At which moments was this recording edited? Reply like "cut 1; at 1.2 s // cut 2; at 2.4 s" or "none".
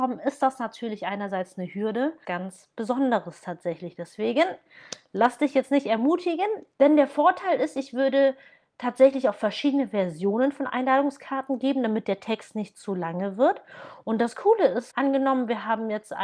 cut 1; at 2.2 s // cut 2; at 6.7 s // cut 3; at 14.9 s